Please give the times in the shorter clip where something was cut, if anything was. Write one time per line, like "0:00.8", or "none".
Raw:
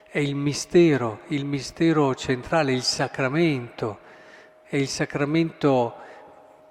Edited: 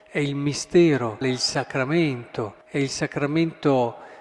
0:01.2
0:02.6